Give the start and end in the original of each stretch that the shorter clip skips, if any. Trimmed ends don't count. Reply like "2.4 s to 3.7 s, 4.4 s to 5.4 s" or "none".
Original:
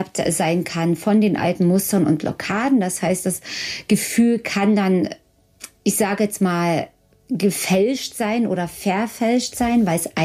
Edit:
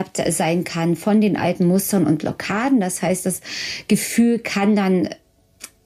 none